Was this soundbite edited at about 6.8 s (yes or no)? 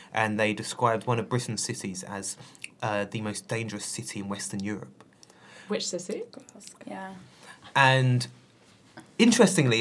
yes